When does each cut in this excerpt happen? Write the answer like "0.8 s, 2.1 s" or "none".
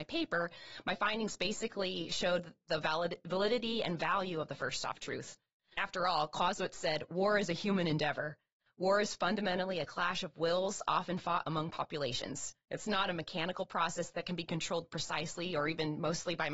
none